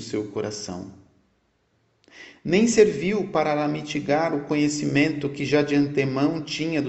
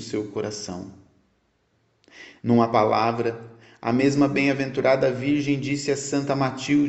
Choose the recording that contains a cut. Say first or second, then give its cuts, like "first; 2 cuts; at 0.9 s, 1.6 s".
second; 1 cut; at 2.4 s